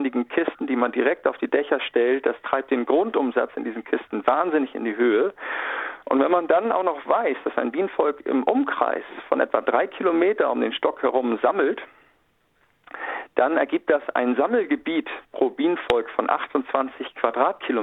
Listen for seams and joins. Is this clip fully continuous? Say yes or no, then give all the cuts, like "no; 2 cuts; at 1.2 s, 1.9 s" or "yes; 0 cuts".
yes; 0 cuts